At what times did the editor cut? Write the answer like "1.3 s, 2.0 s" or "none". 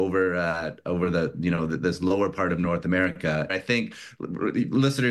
3.5 s